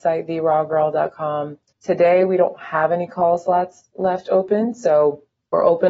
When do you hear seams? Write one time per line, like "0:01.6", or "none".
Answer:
0:01.7

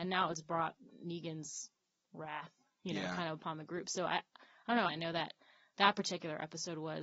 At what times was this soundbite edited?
0:04.9

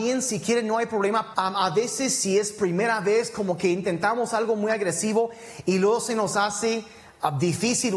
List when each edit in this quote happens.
0:01.3

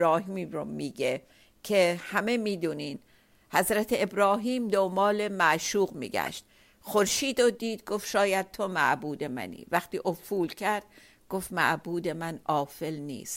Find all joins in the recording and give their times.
none

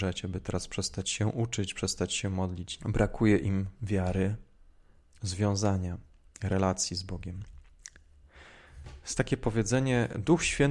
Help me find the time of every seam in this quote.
0:02.8
0:05.1

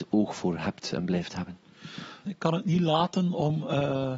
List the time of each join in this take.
0:02.2

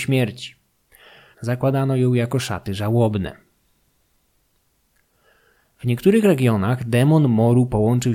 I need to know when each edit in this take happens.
0:01.3

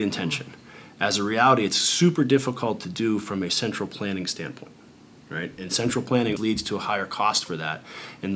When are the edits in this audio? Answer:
0:06.4

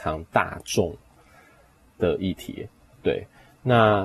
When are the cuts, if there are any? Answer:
none

